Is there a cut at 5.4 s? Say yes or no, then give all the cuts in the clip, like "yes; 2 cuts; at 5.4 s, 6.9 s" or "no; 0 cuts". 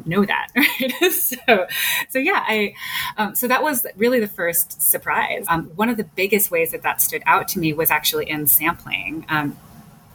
yes; 1 cut; at 5.4 s